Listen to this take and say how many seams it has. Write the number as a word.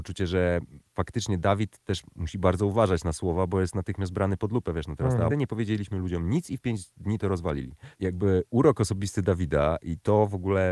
two